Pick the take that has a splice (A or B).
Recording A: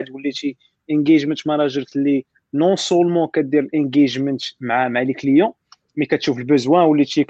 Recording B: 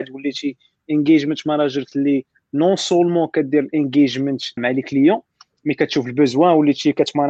B